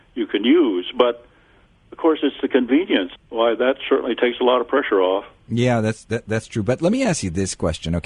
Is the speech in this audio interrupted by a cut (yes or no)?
yes